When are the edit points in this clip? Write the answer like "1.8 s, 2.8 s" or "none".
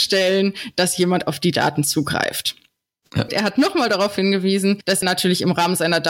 3.3 s, 5.0 s